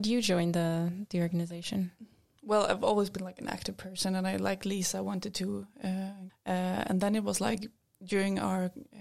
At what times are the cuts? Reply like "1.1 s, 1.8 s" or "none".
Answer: 6.3 s